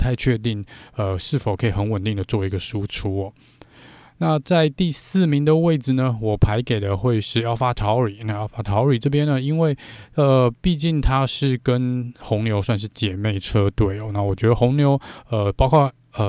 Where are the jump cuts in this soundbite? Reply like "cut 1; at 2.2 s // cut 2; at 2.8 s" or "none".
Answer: none